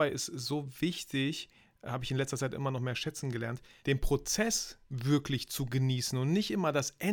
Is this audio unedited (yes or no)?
no